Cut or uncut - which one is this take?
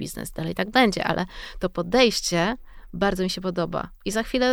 uncut